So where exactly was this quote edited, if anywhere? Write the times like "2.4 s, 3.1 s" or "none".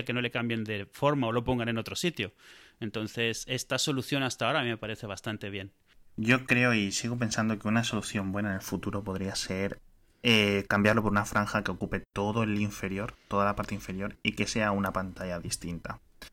none